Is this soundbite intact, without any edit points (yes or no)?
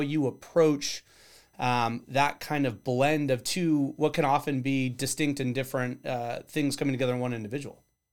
yes